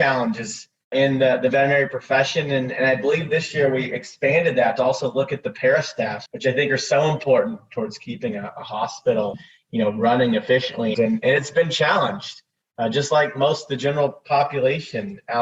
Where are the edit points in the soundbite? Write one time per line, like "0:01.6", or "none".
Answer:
0:06.3
0:10.9